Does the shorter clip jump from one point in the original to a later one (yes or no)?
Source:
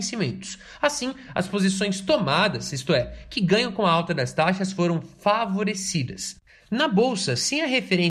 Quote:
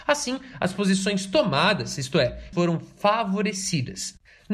yes